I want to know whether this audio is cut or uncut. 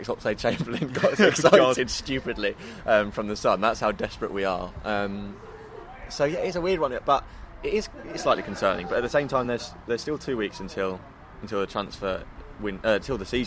uncut